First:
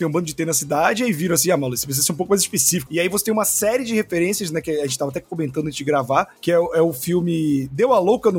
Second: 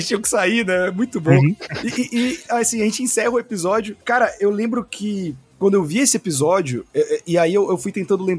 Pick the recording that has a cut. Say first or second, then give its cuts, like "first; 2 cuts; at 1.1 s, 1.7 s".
first; 1 cut; at 2.9 s